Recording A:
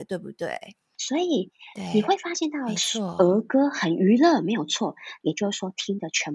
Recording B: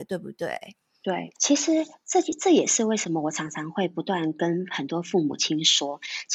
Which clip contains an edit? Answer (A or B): A